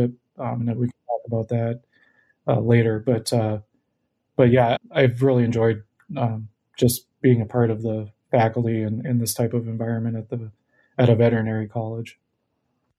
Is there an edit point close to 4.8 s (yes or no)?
yes